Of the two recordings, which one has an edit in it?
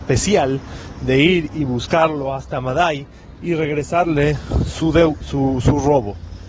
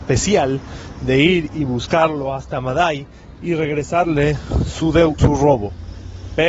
second; 1 cut; at 5.2 s

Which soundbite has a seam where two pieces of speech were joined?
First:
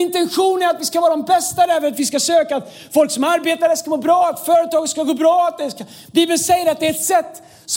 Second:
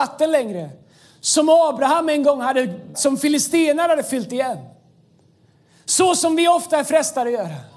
second; 1 cut; at 2.9 s

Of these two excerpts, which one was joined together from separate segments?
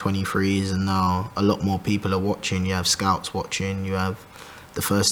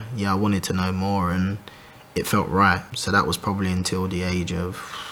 second; 1 cut; at 2.9 s

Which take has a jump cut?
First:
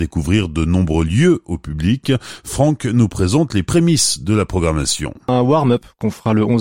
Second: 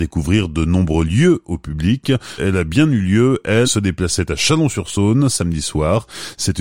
second; 2 cuts; at 2.4 s, 3.6 s

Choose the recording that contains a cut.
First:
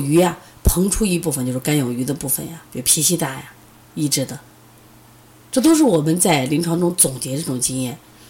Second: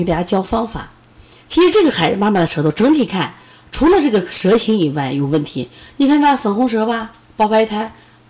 first; 1 cut; at 2.7 s

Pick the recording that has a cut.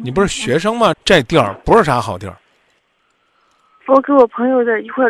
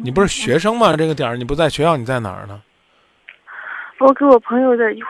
first; 2 cuts; at 0.9 s, 3.8 s

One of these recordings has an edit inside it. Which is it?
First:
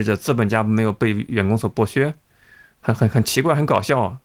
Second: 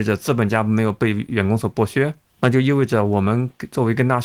second; 1 cut; at 2.3 s

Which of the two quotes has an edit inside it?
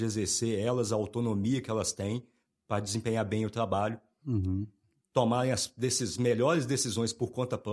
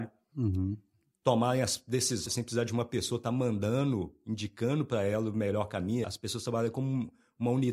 second; 2 cuts; at 2.3 s, 6.0 s

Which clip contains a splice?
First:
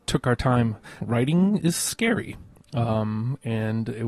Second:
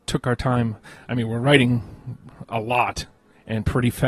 first; 1 cut; at 1.0 s

